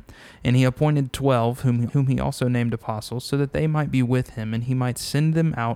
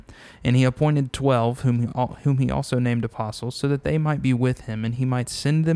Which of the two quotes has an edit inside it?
first; 1 cut; at 1.9 s

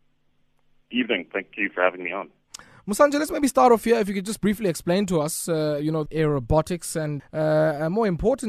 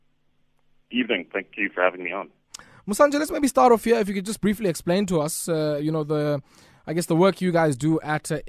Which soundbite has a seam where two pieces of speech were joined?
first; 2 cuts; at 6.1 s, 7.2 s

